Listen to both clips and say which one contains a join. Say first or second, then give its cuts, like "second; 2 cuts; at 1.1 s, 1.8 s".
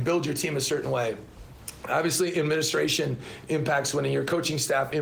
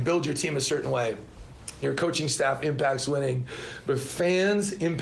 second; 1 cut; at 1.8 s